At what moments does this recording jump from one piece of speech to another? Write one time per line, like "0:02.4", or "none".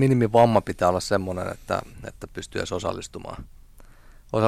0:02.1